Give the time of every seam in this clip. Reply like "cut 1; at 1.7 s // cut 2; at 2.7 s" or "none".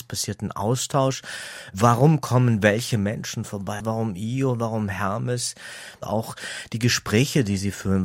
cut 1; at 3.8 s